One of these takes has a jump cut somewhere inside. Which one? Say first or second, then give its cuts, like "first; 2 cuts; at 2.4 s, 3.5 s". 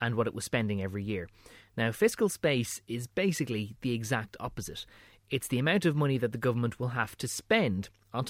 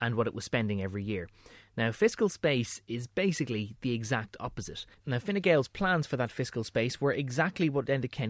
second; 1 cut; at 4.9 s